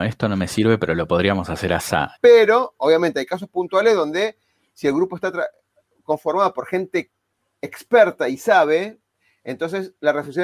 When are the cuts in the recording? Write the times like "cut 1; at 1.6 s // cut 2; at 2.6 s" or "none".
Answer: cut 1; at 2.2 s